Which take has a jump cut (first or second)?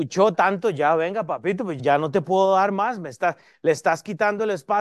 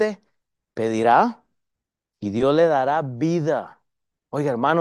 first